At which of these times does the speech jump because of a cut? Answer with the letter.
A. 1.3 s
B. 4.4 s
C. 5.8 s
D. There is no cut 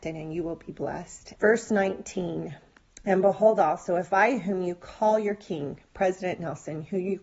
A